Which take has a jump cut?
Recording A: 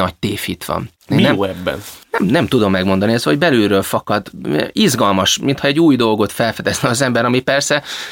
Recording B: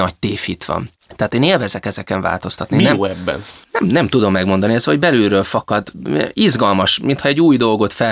A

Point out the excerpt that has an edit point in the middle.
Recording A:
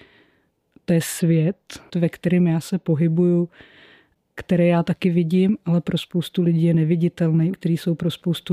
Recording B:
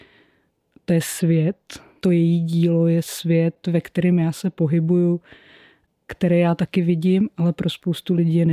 A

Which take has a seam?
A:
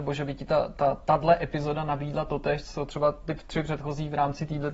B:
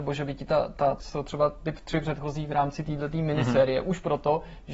B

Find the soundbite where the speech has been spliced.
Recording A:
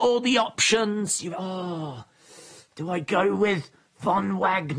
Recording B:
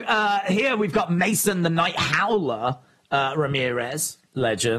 A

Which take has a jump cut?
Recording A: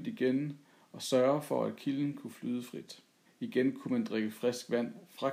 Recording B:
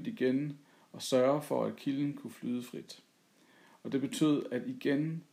A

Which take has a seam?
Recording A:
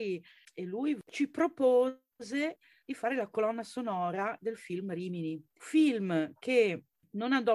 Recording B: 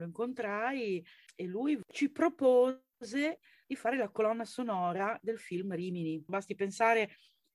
B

